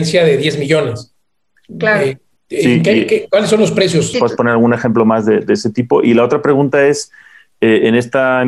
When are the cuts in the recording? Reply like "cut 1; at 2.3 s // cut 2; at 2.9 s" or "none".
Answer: cut 1; at 4.1 s